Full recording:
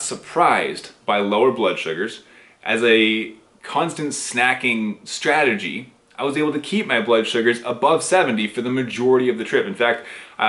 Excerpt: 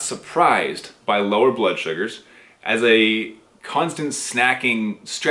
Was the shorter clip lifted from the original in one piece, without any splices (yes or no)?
yes